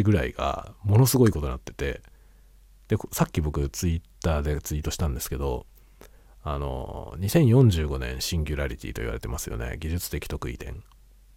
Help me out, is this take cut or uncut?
uncut